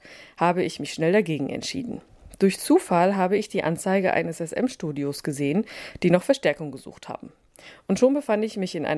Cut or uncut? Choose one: uncut